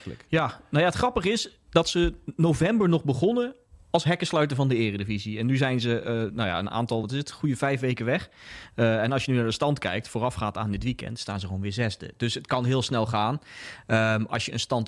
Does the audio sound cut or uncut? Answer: uncut